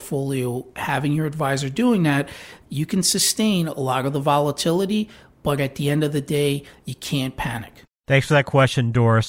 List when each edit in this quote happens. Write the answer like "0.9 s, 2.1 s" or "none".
2.6 s